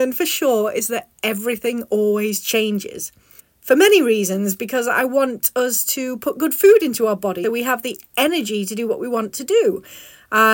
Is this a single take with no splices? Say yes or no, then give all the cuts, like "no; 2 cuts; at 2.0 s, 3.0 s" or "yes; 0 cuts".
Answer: no; 3 cuts; at 3.4 s, 4.6 s, 7.4 s